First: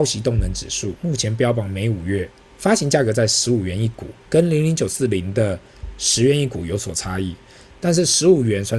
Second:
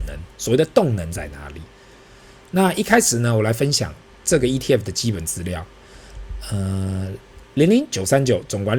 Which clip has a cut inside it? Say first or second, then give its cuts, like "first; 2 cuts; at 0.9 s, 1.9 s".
first; 2 cuts; at 2.5 s, 4.2 s